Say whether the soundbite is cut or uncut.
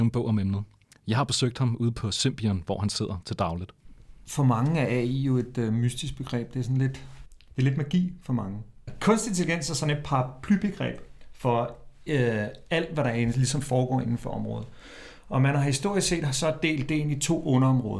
uncut